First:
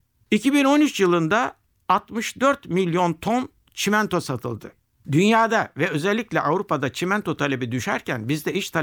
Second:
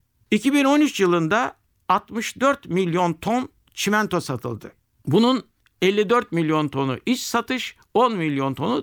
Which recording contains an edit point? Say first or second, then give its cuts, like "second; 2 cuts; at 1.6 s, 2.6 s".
first; 1 cut; at 5.0 s